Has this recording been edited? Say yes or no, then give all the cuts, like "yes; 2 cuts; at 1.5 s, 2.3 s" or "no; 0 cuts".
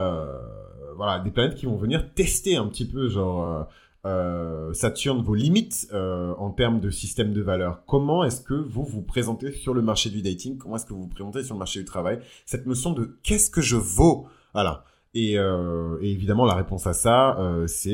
no; 0 cuts